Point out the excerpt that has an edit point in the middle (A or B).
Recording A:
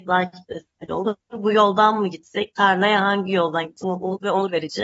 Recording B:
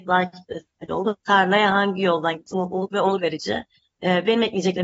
B